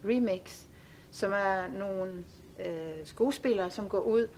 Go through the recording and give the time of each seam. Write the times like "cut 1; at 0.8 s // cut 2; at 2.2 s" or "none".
none